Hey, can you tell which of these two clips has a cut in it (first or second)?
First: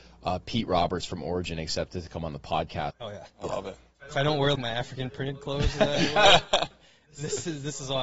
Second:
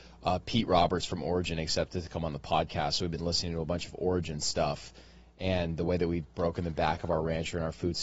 first